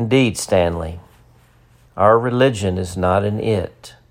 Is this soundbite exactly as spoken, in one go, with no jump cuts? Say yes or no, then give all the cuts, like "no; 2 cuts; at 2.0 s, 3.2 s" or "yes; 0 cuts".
no; 1 cut; at 1.9 s